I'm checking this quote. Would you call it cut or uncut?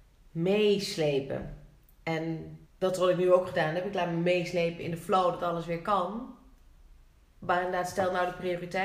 cut